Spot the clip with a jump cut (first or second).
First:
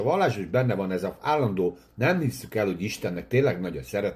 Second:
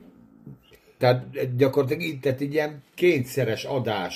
second